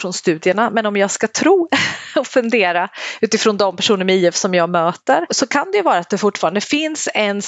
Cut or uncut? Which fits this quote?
cut